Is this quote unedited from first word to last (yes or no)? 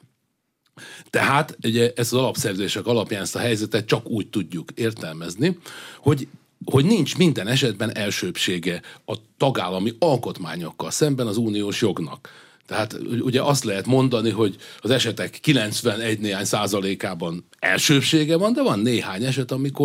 yes